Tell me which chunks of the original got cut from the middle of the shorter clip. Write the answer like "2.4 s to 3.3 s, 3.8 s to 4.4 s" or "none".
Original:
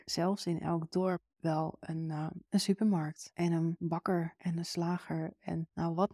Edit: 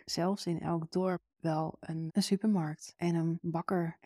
2.1 s to 2.4 s